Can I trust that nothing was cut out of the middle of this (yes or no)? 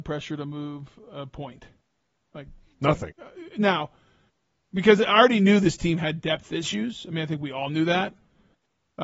no